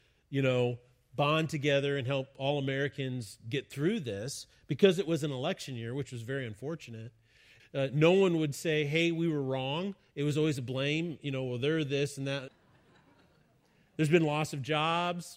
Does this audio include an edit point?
yes; 2 cuts; at 7.6 s, 12.5 s

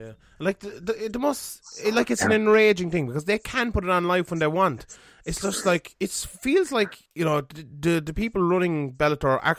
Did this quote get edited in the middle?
yes; 1 cut; at 7.1 s

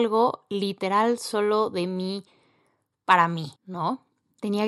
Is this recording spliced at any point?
yes; 1 cut; at 3.6 s

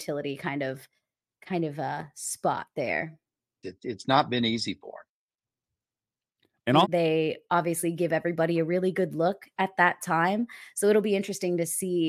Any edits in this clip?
yes; 2 cuts; at 3.6 s, 6.8 s

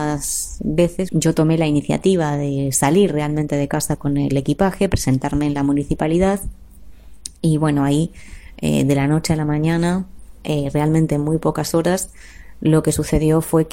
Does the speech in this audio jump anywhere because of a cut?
yes; 1 cut; at 1.1 s

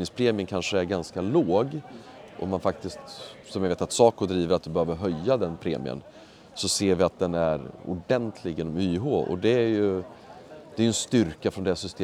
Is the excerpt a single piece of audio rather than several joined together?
yes; 0 cuts

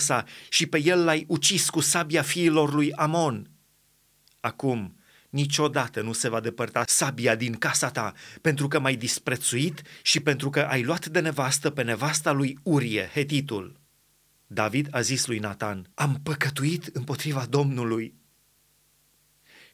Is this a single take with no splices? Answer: no; 2 cuts; at 14.4 s, 15.9 s

